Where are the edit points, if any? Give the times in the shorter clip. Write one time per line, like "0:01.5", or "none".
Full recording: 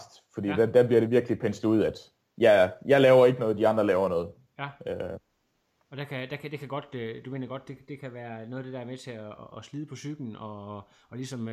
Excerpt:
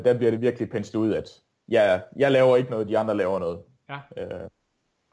none